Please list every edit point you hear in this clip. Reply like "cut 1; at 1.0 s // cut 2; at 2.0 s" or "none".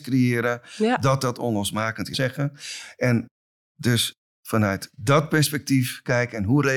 cut 1; at 2.1 s